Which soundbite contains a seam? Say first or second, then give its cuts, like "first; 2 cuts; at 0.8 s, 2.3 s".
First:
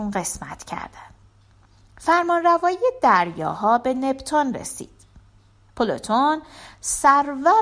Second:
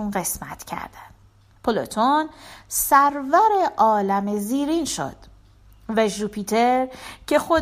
second; 1 cut; at 1.6 s